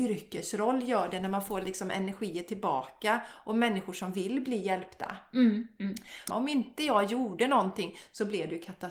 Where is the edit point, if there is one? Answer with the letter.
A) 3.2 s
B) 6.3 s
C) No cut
B